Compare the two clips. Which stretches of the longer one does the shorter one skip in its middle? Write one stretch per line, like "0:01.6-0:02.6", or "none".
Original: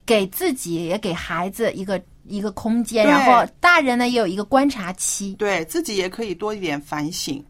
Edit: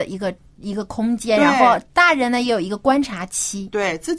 none